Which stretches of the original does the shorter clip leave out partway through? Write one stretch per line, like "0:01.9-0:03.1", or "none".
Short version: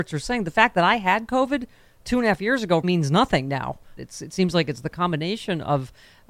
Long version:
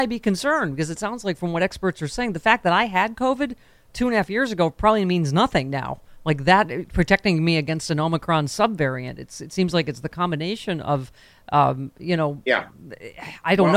0:04.7-0:05.1
0:06.2-0:09.2